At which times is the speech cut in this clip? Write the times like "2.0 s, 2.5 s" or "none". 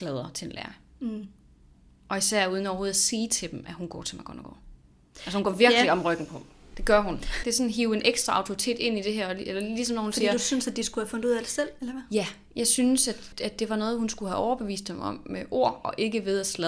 7.4 s